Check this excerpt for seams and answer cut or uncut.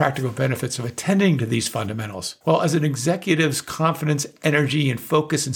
cut